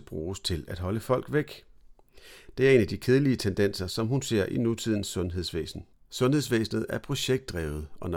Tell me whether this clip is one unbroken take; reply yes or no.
yes